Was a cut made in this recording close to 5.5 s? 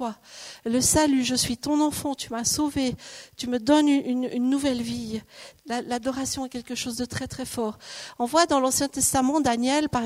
yes; 1 cut; at 5.5 s

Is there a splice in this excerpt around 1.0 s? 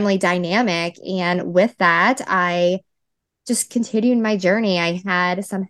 no; 0 cuts

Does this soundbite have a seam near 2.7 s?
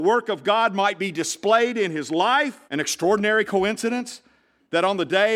yes; 1 cut; at 2.7 s

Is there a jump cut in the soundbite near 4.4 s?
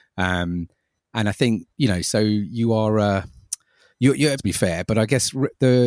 yes; 1 cut; at 4.4 s

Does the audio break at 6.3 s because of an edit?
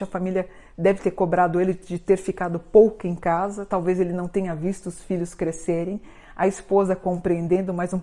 no; 0 cuts

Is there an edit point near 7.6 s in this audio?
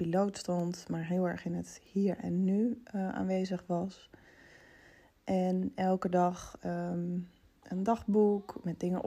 yes; 1 cut; at 7.6 s

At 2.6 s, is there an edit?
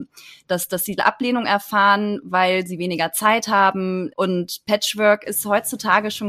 no; 1 cut; at 4.1 s

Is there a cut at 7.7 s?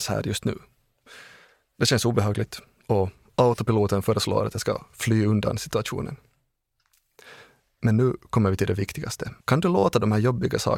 no; 1 cut; at 9.4 s

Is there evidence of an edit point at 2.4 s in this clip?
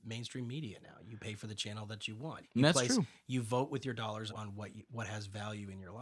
yes; 2 cuts; at 2.4 s, 4.3 s

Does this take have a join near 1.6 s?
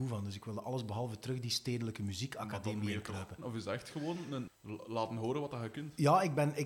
no; 2 cuts; at 3.4 s, 4.5 s

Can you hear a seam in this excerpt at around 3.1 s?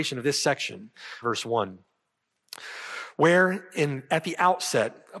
no; 1 cut; at 1.2 s

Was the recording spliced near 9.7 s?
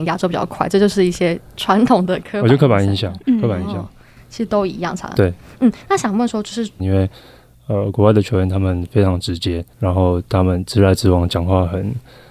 yes; 2 cuts; at 6.8 s, 9.7 s

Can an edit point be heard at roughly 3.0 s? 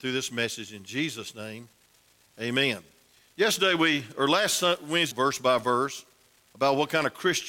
no; 1 cut; at 5.1 s

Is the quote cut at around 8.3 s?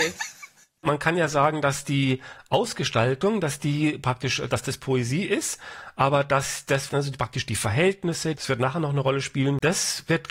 yes; 2 cuts; at 6.9 s, 8.3 s

